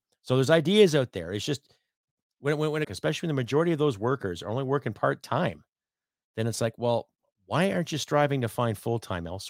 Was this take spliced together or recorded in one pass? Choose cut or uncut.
cut